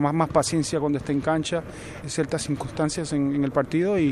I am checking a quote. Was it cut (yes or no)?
yes